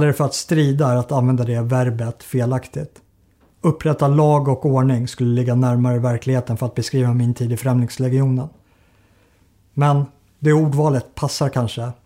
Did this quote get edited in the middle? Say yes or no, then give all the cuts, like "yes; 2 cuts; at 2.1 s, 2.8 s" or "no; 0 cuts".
no; 0 cuts